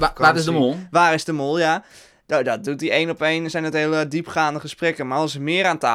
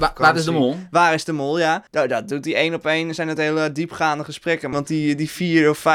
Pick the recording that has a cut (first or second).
second